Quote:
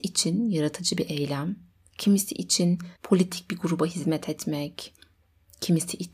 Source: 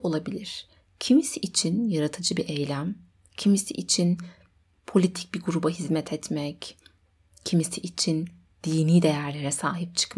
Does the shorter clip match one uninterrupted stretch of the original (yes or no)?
no